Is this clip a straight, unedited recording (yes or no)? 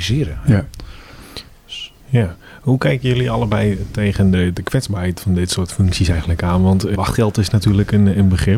no